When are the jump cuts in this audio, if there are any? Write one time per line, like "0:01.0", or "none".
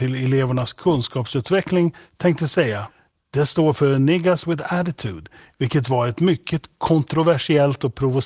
none